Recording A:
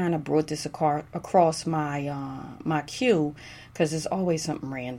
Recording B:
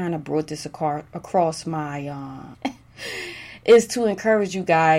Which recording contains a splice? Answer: B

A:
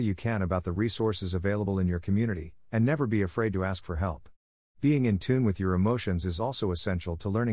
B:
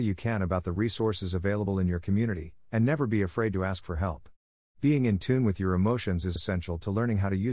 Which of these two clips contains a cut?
B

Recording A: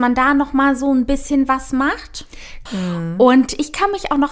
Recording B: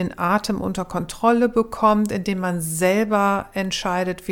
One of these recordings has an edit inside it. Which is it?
A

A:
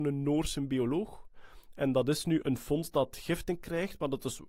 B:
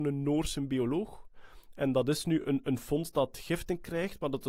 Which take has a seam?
A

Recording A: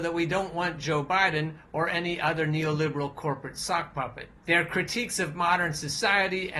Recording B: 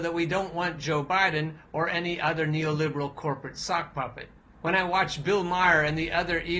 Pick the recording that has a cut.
A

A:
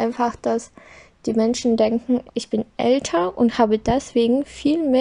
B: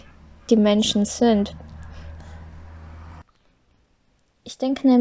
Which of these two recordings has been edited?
A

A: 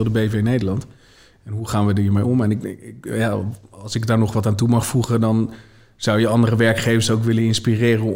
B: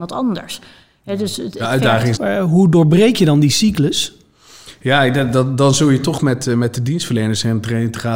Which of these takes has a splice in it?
B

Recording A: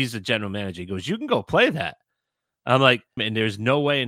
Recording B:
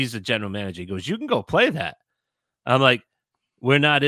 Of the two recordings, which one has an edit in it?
A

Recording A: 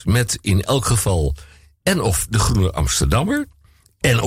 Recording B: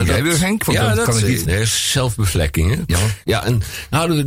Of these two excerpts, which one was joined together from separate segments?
B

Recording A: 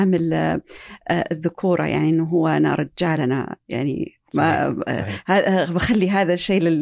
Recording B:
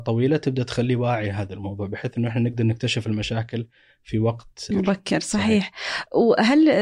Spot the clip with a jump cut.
B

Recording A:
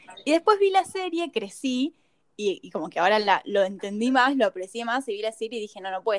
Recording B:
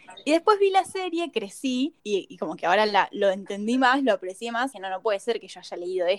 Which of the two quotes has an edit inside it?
B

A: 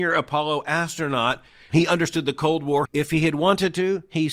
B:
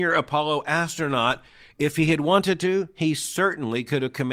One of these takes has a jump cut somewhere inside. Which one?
A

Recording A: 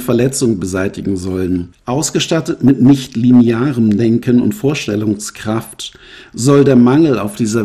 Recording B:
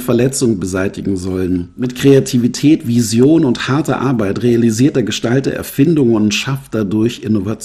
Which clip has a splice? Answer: A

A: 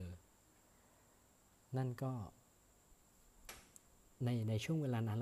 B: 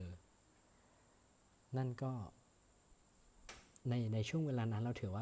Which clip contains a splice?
B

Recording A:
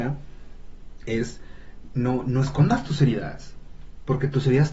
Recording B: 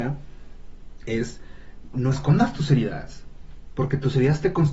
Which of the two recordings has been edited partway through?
B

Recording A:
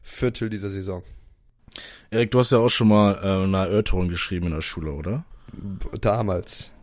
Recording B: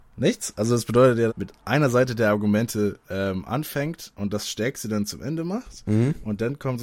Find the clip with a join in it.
B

